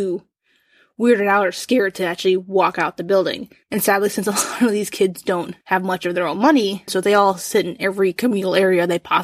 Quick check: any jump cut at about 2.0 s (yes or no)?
no